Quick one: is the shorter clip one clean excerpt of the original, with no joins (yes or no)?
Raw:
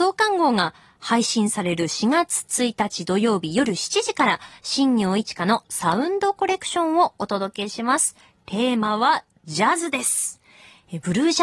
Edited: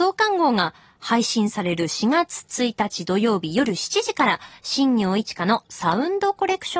yes